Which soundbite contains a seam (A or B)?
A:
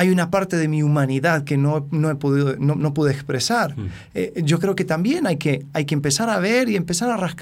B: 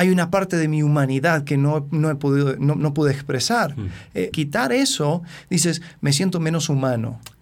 B